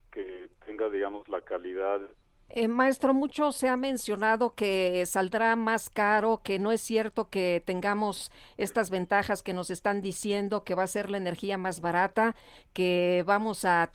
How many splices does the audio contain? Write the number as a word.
one